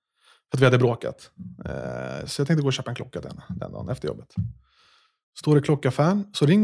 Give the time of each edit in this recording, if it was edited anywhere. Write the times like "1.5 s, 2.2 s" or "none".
none